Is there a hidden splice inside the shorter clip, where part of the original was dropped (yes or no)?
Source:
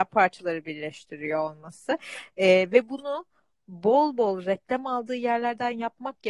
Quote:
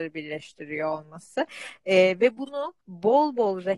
yes